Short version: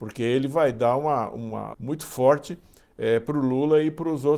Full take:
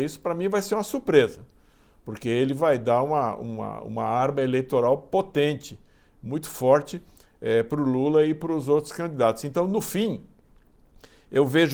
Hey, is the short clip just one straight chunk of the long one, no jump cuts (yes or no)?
no